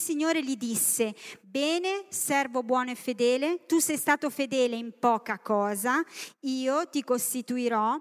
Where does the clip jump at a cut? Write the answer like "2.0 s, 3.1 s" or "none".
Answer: none